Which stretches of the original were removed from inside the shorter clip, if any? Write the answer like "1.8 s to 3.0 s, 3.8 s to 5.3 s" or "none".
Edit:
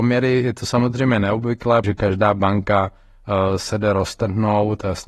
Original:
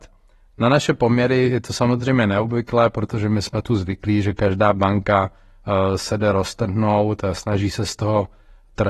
2.9 s to 4.2 s